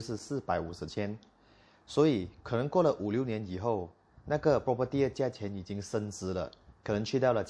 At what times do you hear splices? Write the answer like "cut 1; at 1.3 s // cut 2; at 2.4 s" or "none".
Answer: none